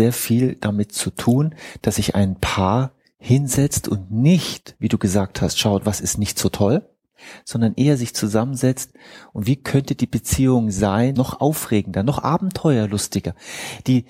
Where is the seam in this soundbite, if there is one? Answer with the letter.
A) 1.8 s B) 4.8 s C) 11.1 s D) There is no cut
C